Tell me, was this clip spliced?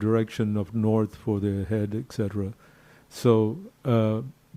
no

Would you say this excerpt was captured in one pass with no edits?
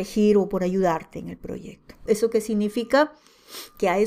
no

